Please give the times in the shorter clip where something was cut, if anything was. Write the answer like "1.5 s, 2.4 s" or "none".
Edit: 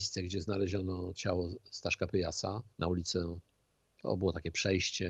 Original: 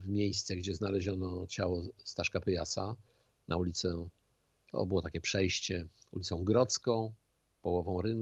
2.7 s